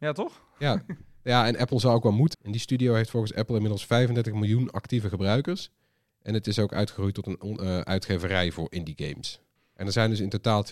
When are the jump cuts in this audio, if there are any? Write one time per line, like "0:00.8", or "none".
0:02.3
0:09.6